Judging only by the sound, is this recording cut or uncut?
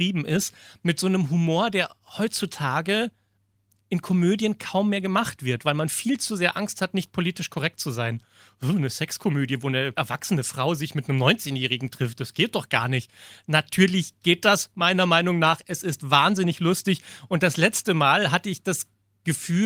uncut